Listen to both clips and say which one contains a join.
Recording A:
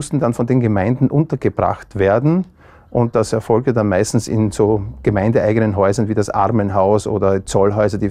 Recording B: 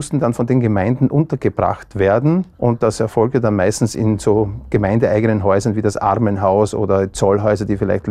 B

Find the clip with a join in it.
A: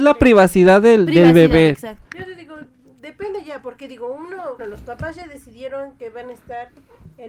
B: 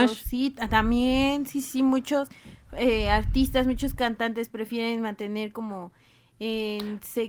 A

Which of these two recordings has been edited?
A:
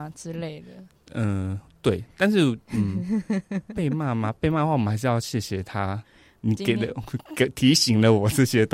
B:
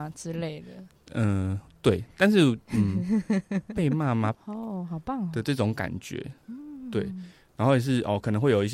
B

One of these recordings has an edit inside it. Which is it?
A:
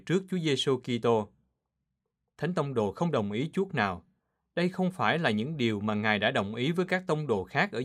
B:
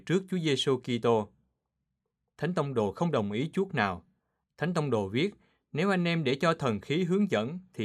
B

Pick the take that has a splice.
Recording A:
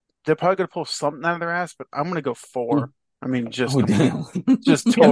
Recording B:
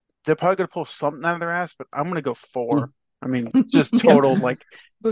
B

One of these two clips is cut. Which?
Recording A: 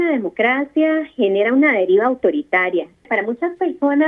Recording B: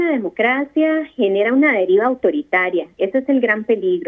A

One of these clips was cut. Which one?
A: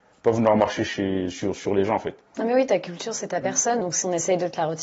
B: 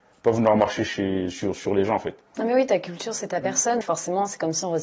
B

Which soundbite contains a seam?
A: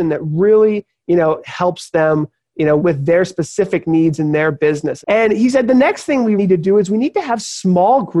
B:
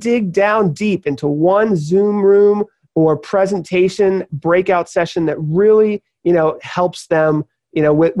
A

